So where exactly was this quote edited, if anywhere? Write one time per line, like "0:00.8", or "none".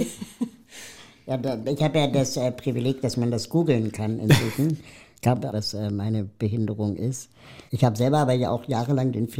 0:05.5